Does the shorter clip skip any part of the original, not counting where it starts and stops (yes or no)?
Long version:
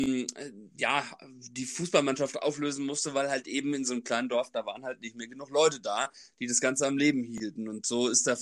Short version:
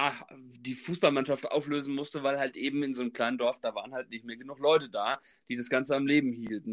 no